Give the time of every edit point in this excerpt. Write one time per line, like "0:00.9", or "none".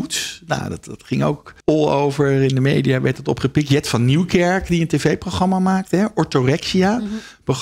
0:01.6